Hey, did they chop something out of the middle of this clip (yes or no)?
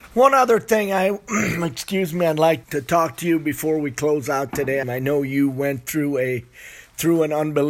yes